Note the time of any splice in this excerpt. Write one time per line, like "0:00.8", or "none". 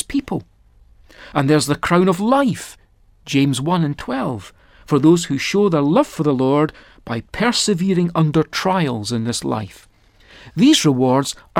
none